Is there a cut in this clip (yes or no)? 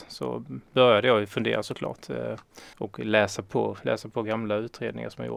yes